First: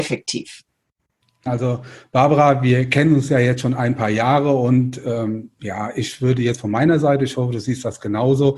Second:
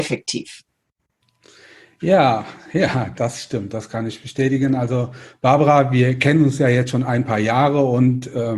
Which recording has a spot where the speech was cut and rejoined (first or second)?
first